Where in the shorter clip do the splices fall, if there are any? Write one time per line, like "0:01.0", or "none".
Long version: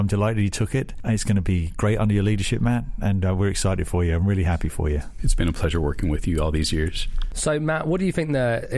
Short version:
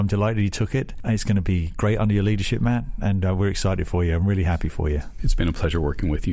none